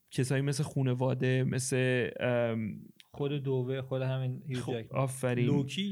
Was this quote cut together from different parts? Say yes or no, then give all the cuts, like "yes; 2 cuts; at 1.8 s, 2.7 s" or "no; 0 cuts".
no; 0 cuts